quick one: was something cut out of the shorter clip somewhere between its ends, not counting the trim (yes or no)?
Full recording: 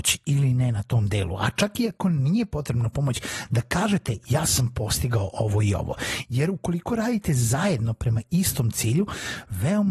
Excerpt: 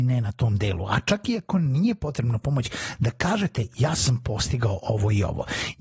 no